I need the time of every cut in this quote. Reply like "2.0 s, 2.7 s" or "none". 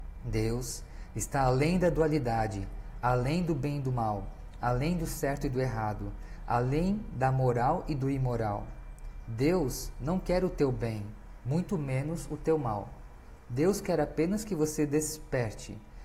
none